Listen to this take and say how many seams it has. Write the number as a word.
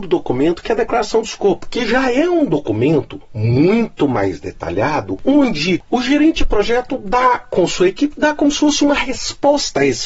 zero